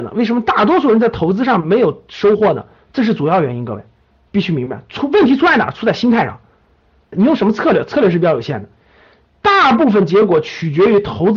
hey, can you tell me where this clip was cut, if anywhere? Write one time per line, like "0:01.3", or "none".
0:07.1